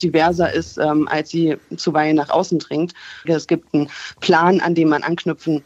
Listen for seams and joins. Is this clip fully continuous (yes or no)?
no